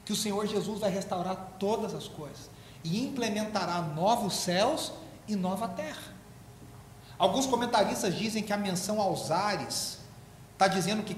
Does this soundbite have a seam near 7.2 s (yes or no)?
no